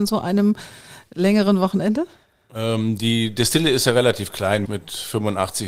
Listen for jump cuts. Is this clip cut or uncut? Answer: cut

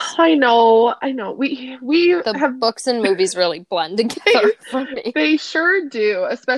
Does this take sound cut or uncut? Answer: uncut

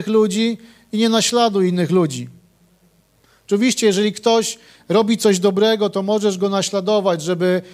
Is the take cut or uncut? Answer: uncut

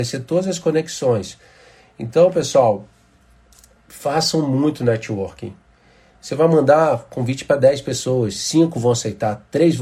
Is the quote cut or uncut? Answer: uncut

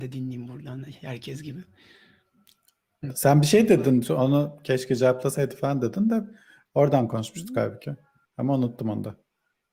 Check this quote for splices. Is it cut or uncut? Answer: cut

